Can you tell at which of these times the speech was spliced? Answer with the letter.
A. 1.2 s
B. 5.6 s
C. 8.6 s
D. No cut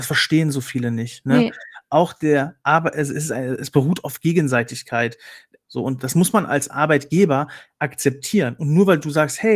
B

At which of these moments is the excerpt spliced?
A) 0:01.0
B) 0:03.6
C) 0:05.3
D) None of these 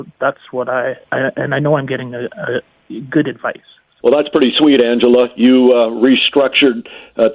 D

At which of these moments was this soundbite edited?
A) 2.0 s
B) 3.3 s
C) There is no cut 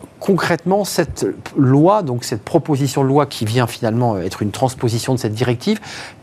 B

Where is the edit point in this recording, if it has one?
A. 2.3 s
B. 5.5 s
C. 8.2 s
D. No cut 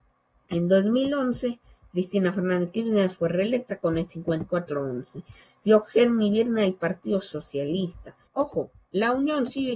C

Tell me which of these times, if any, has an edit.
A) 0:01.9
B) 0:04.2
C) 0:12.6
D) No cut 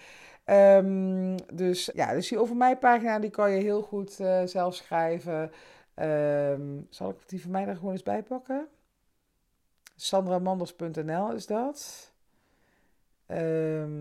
A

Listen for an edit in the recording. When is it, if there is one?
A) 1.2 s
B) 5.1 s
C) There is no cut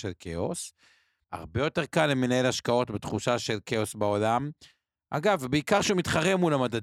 A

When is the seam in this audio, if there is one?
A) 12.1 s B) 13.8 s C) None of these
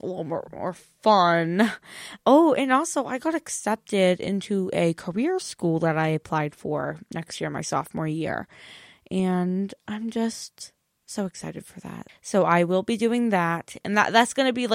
A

